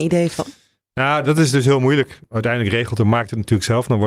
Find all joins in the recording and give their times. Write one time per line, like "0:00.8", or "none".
0:02.3